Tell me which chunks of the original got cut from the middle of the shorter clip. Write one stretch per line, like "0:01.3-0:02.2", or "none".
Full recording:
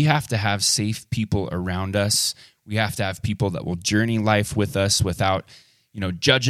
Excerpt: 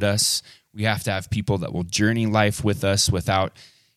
none